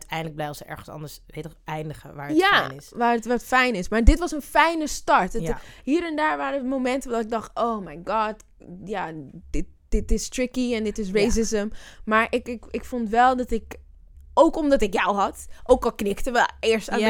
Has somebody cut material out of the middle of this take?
no; 0 cuts

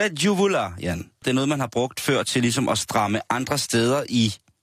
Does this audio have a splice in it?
yes; 1 cut; at 1.2 s

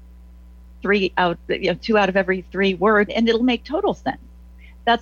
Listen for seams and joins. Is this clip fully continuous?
no; 1 cut; at 3.1 s

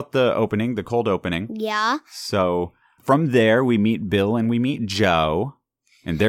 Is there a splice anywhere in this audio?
yes; 1 cut; at 3.0 s

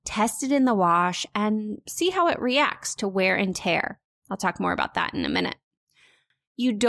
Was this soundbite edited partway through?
no; 0 cuts

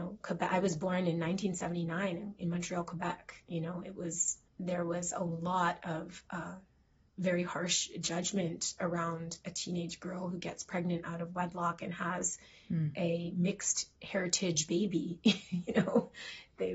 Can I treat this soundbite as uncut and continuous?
no; 1 cut; at 4.5 s

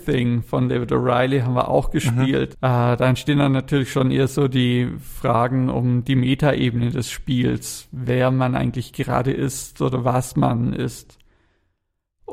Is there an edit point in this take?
yes; 1 cut; at 2.5 s

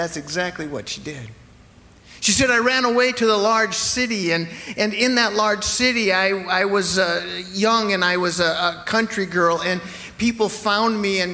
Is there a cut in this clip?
no; 0 cuts

